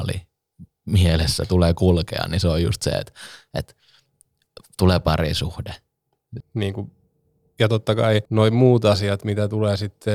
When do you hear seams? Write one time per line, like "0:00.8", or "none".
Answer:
0:06.4
0:08.3